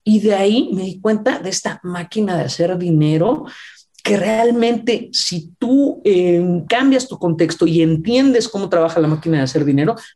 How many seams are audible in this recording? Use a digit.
1